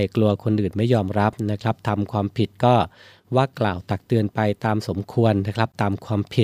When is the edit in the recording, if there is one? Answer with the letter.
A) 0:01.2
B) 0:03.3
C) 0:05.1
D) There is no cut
D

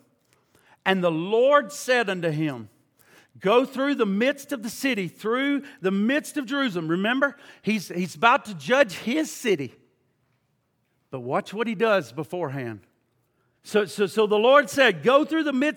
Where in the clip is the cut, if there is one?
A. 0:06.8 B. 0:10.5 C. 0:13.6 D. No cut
C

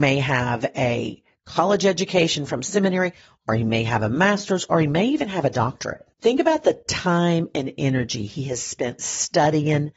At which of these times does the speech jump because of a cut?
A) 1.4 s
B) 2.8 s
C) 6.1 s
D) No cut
C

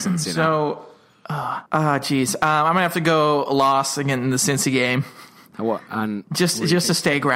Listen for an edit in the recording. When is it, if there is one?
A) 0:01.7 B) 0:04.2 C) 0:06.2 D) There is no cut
A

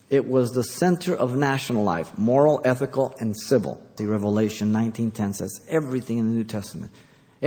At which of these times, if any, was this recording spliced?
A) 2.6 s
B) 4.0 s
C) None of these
B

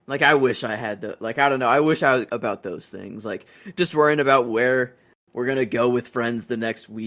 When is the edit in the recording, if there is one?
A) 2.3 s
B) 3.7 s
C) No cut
A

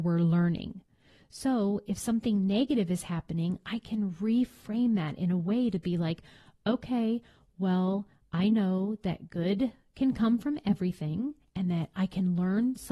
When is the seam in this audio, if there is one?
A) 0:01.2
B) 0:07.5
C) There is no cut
C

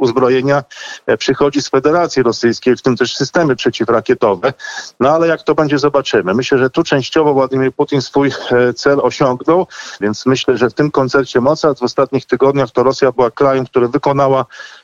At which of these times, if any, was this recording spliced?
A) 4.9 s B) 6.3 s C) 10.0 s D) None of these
C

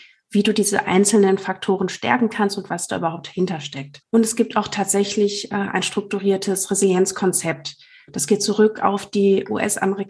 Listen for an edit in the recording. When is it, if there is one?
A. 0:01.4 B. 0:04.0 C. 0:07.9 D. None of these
B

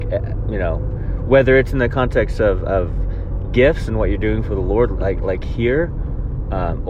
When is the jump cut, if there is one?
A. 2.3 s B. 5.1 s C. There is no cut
C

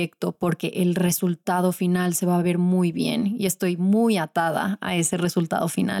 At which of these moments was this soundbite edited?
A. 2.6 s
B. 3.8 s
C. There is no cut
C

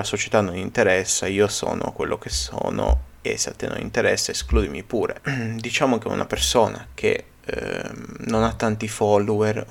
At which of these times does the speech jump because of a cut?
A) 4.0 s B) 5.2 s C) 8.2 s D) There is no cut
B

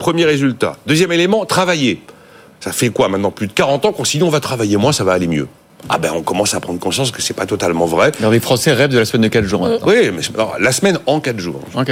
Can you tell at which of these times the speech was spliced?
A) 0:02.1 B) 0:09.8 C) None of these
C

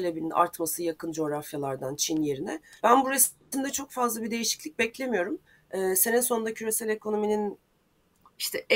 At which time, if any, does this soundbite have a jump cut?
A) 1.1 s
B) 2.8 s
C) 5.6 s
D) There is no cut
B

